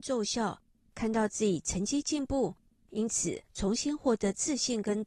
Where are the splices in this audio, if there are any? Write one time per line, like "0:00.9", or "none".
none